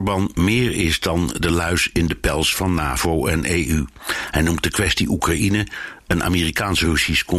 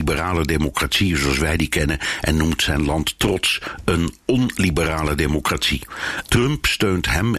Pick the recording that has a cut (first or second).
second